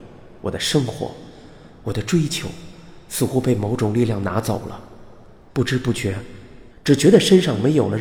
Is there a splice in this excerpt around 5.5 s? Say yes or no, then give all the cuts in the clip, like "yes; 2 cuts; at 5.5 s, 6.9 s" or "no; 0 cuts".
yes; 2 cuts; at 5.5 s, 6.7 s